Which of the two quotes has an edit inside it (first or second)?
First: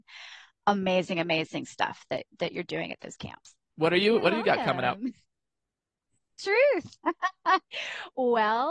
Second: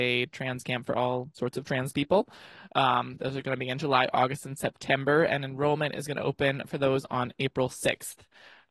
first